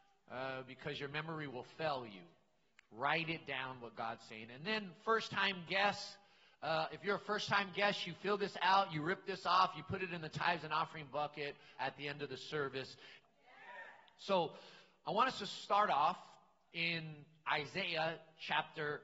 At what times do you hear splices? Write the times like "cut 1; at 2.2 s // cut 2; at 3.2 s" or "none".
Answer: cut 1; at 11.8 s // cut 2; at 13.2 s